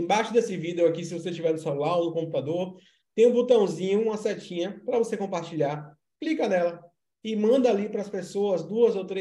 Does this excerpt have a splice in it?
no; 0 cuts

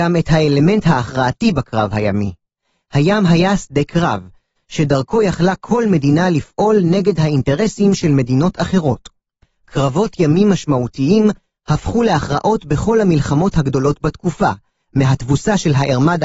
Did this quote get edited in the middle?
yes; 1 cut; at 4.6 s

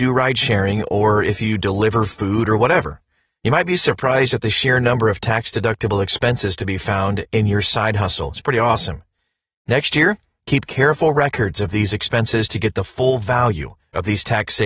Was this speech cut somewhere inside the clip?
no; 0 cuts

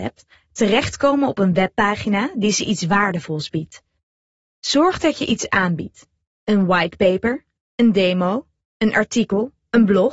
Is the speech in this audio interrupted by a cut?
no; 0 cuts

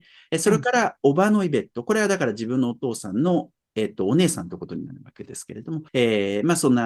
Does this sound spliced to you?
yes; 1 cut; at 5.9 s

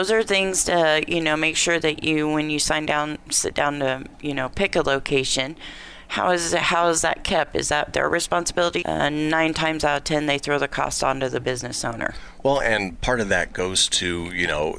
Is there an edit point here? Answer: yes; 1 cut; at 8.8 s

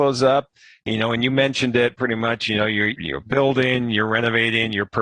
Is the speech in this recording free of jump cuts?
yes; 0 cuts

